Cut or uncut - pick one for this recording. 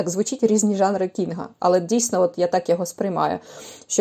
uncut